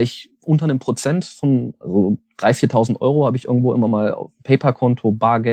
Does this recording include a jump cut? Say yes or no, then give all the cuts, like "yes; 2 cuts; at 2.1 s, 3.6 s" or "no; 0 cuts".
no; 0 cuts